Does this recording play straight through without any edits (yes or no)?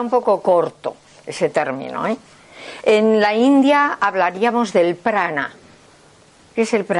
yes